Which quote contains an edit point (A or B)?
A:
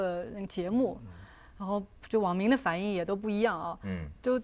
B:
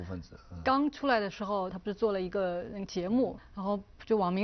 B